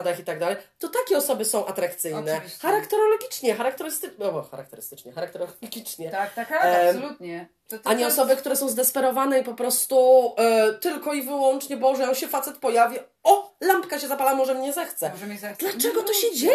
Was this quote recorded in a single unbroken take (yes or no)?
yes